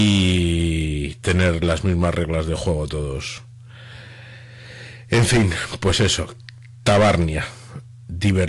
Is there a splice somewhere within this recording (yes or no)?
no